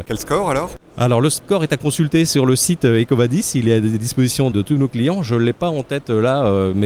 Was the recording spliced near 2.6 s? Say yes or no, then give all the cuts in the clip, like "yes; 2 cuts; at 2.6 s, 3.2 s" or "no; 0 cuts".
no; 1 cut; at 4.5 s